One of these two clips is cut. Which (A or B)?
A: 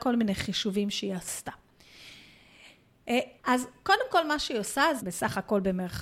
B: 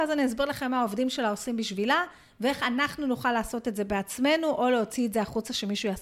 A